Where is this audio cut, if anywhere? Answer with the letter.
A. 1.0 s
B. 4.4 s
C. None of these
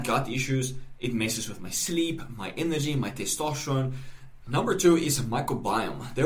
B